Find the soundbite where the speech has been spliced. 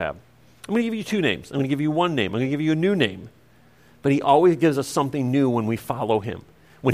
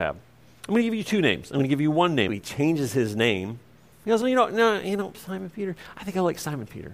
second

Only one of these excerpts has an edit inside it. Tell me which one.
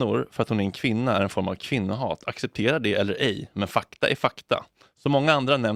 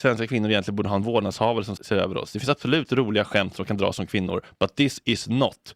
second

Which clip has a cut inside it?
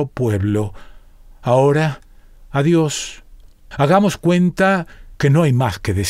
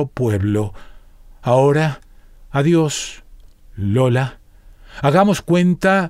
first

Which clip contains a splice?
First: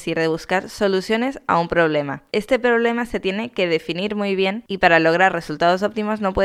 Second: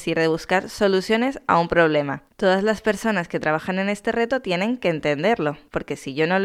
second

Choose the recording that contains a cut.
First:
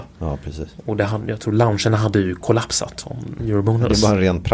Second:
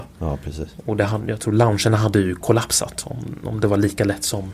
first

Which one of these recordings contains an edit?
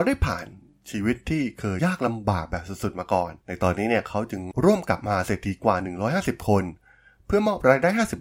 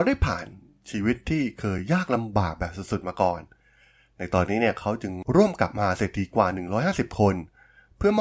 first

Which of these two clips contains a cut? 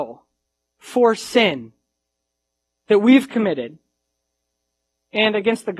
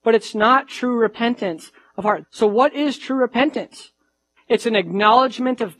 second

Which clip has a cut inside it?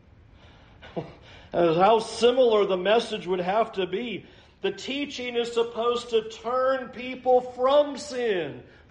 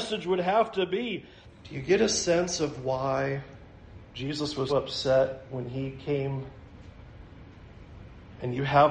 second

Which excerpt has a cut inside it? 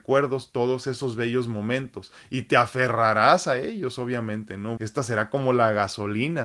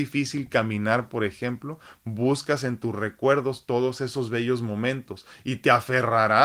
first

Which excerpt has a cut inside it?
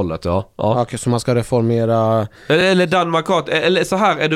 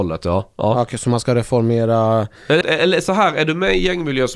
second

